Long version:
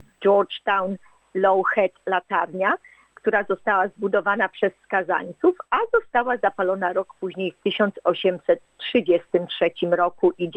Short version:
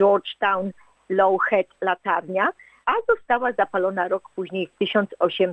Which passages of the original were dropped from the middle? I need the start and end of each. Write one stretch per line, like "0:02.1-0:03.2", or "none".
0:03.1-0:05.7